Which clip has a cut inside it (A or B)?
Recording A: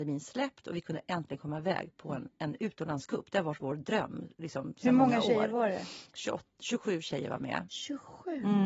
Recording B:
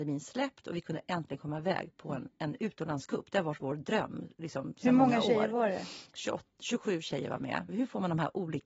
B